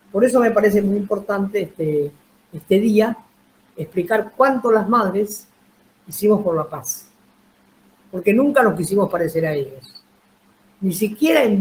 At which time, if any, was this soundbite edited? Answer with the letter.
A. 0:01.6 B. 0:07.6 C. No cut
C